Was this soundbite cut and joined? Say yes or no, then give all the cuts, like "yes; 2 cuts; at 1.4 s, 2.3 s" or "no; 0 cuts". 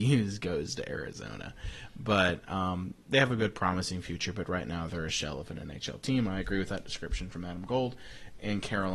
no; 0 cuts